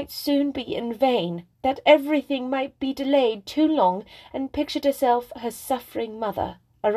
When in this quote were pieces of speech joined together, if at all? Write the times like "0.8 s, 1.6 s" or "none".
1.5 s